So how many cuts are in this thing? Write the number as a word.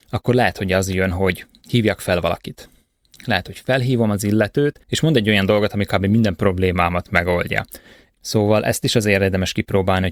two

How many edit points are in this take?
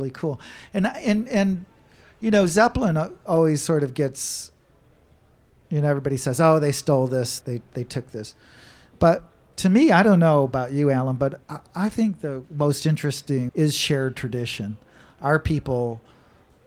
three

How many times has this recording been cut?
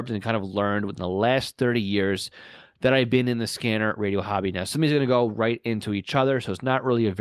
zero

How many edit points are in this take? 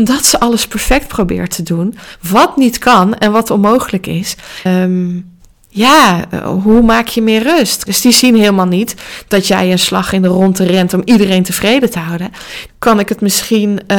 three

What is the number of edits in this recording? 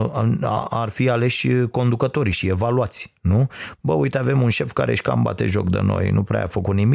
zero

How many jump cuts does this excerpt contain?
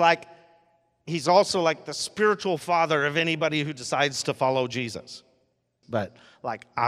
one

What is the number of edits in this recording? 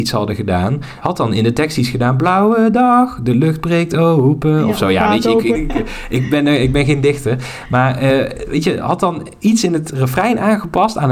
one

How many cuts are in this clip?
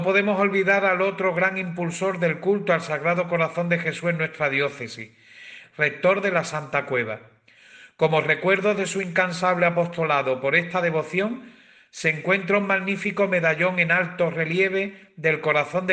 one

